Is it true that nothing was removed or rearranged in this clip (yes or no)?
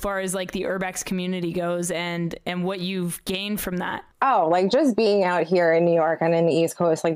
no